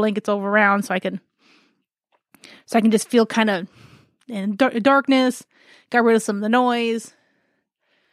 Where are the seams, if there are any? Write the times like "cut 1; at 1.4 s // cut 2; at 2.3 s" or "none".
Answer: none